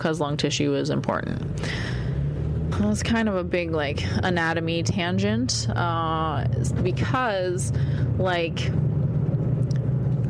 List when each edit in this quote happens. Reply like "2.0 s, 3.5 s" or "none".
2.7 s